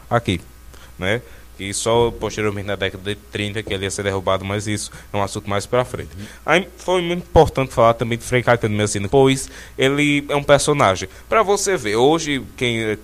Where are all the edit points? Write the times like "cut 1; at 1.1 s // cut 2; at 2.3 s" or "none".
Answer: cut 1; at 9.1 s